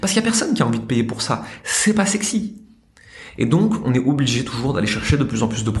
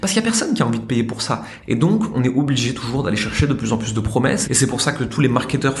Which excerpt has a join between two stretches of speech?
second; 2 cuts; at 1.6 s, 4.4 s

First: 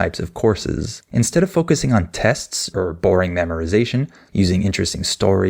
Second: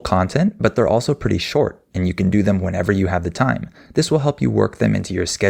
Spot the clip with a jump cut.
first; 2 cuts; at 2.7 s, 4.3 s

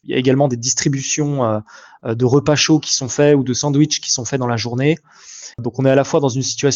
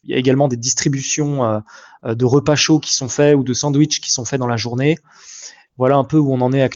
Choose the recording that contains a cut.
first; 1 cut; at 5.5 s

